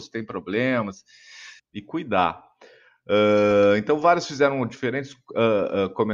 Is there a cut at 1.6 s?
yes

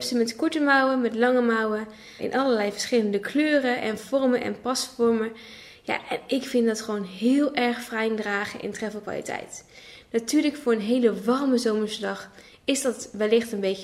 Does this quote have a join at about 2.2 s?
yes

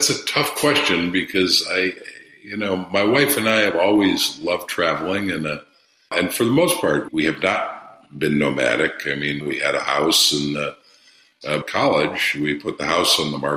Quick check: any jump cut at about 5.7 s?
no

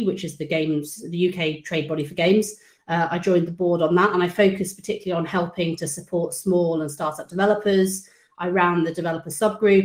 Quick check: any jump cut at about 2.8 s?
no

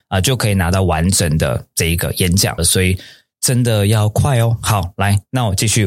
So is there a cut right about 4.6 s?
no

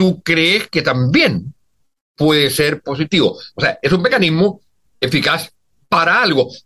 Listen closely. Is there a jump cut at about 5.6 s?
no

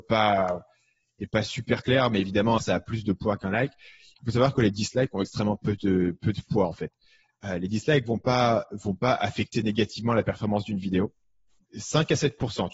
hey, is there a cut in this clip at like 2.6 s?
yes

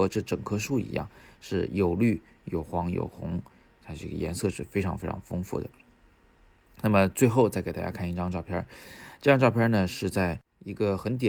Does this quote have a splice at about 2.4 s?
no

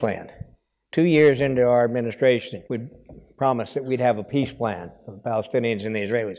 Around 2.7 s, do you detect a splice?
yes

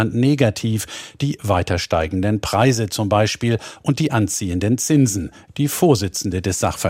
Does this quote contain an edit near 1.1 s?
no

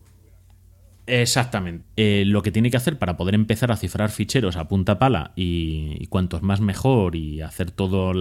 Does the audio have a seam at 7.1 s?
no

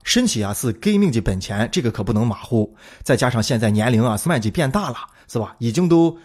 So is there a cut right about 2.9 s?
no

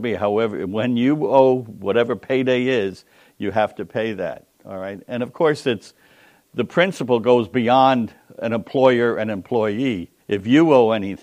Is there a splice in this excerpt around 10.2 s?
yes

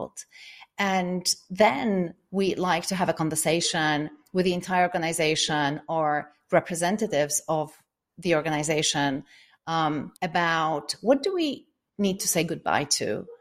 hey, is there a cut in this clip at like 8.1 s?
no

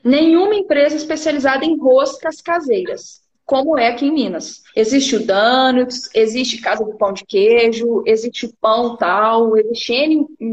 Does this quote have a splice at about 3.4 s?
no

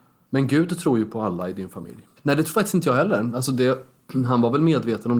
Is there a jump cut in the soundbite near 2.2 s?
yes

